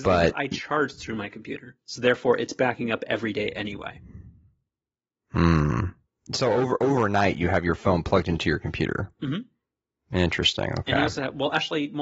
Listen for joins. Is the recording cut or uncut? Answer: uncut